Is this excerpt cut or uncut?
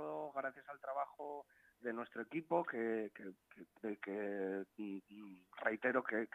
cut